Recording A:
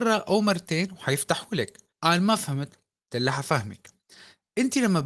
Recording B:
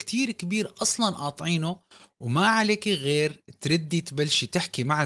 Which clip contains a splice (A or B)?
A